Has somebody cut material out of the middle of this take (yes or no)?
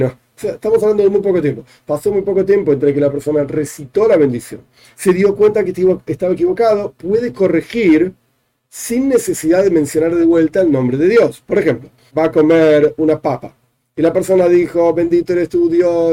yes